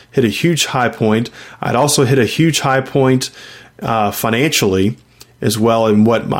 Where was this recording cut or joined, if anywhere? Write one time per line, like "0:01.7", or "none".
none